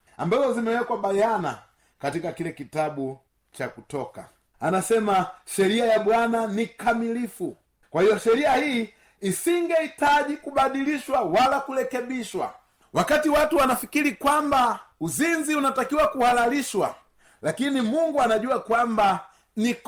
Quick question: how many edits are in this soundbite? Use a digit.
1